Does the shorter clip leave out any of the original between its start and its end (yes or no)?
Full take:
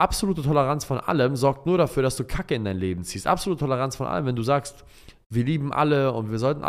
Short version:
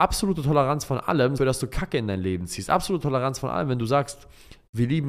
yes